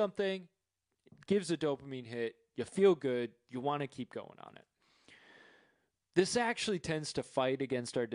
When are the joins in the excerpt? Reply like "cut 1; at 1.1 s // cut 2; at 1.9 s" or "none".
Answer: none

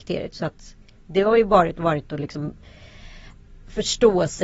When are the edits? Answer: none

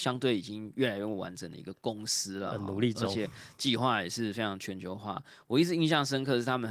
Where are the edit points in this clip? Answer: none

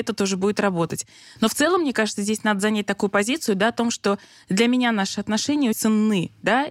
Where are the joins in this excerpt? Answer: cut 1; at 5.7 s

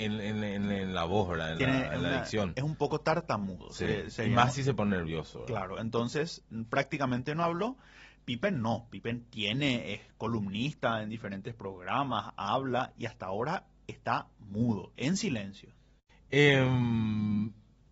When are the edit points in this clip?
none

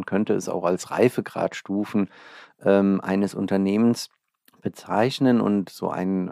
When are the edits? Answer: none

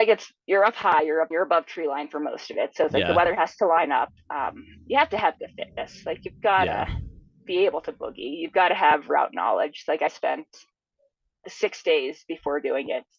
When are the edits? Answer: cut 1; at 1.3 s

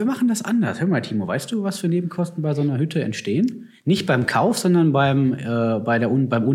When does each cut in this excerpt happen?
none

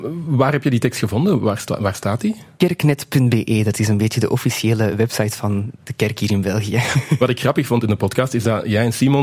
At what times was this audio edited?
none

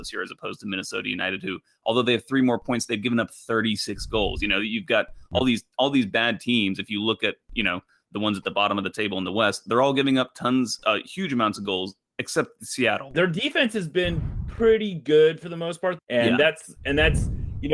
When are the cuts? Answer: cut 1; at 13.1 s // cut 2; at 16.0 s

